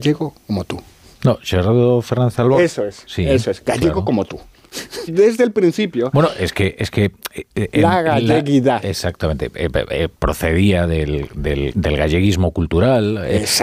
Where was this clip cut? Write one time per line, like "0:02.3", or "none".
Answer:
0:05.1
0:11.7